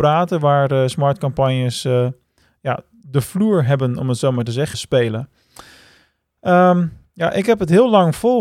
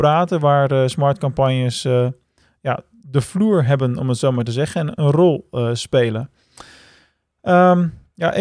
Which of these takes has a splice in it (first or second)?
first